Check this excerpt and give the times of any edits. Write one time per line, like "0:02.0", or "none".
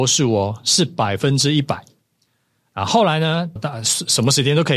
0:03.6